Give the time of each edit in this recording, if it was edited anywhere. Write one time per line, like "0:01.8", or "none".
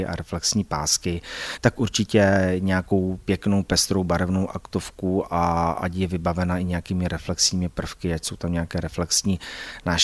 0:01.5